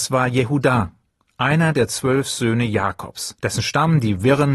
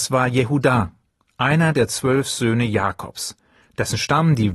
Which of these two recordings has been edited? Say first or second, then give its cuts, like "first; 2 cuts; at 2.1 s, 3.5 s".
first; 1 cut; at 3.4 s